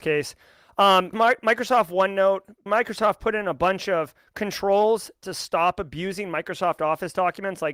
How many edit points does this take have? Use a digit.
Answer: 2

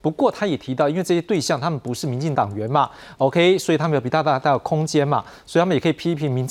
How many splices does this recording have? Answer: 1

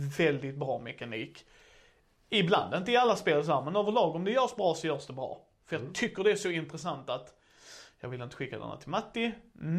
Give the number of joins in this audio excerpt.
0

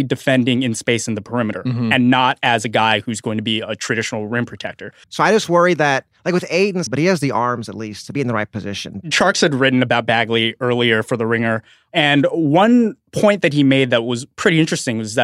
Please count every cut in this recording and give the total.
3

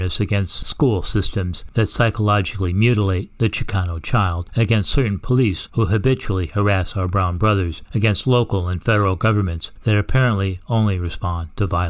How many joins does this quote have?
0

